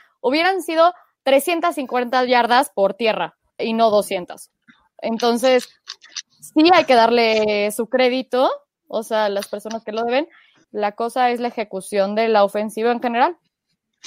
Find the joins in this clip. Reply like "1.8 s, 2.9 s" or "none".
3.6 s, 10.6 s